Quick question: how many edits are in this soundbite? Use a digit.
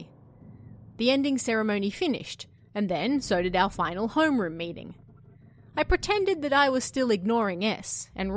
0